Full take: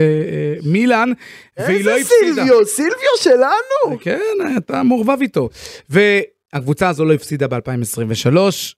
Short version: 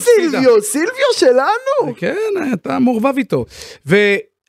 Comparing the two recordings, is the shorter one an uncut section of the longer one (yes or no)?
yes